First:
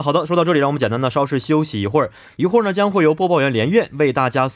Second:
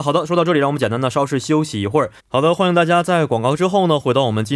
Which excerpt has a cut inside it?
second; 1 cut; at 2.2 s

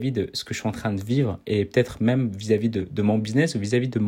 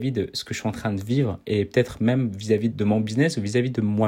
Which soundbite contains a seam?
second; 1 cut; at 2.7 s

